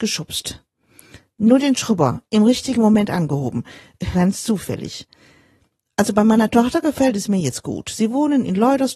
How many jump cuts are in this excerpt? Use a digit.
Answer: 1